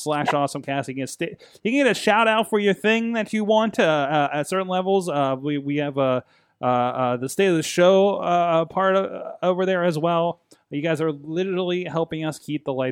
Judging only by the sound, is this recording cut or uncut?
uncut